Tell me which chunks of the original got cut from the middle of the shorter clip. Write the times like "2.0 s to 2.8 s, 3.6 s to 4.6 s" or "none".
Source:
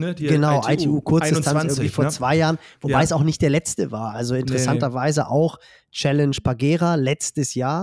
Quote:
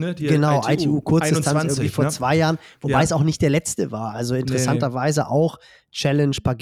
none